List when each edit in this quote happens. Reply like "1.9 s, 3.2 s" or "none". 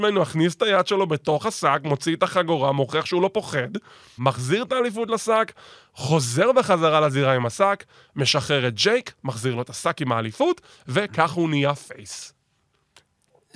4.2 s